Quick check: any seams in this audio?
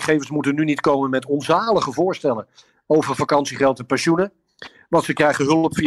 no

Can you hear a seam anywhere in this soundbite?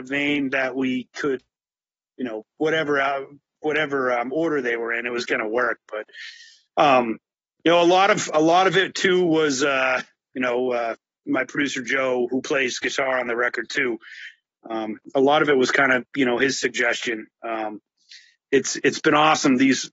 no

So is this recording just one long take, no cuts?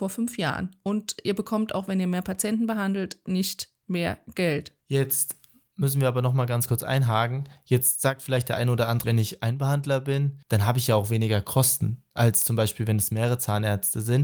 no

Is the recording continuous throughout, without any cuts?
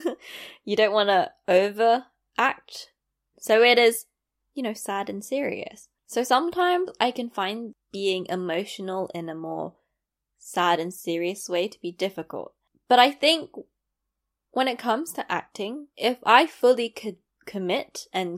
no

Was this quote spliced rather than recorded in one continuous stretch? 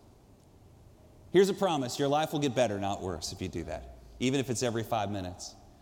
no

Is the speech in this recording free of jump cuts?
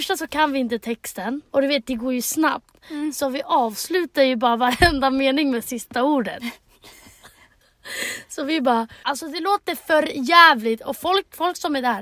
no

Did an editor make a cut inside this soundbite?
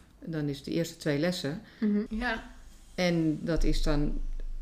yes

